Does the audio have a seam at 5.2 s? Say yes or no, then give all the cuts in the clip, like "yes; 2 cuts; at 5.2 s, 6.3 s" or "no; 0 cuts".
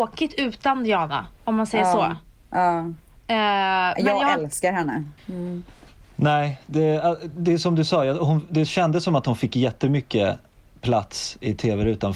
yes; 1 cut; at 5.2 s